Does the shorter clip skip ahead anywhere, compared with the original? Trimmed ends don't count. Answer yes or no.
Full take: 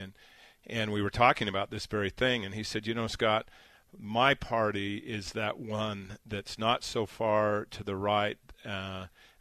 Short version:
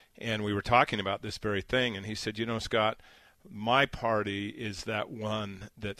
no